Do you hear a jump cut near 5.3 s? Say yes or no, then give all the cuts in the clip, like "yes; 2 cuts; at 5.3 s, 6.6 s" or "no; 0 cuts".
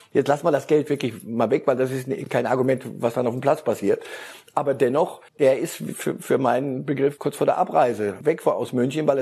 yes; 1 cut; at 5.3 s